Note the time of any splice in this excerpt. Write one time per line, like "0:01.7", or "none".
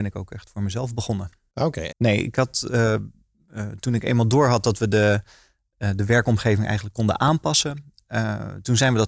0:01.9